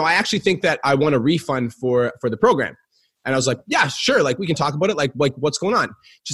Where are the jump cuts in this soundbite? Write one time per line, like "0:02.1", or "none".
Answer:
none